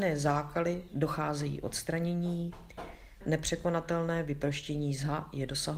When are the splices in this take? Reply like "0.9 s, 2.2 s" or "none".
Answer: 3.2 s